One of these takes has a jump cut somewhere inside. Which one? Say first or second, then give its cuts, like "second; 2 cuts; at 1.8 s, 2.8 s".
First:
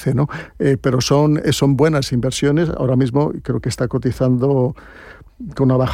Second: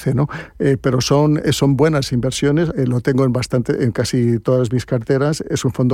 second; 1 cut; at 2.7 s